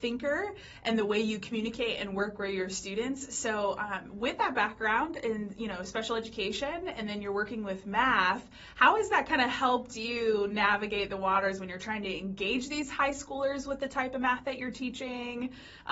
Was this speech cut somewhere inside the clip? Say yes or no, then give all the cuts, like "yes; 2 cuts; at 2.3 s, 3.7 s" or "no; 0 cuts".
no; 0 cuts